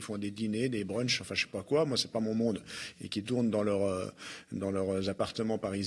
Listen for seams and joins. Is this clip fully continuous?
yes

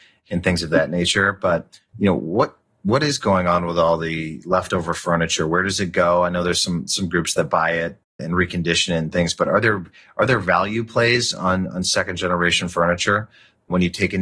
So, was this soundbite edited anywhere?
no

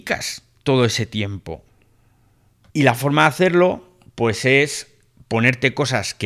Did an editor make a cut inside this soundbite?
yes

